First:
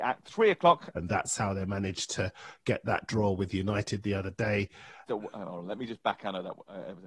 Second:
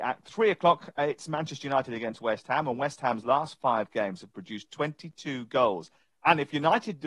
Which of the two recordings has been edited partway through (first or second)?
first